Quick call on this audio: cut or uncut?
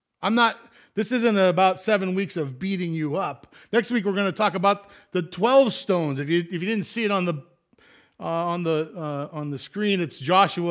cut